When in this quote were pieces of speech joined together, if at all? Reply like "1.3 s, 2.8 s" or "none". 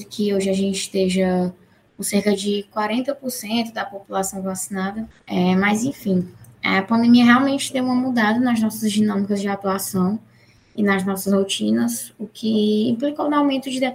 5.1 s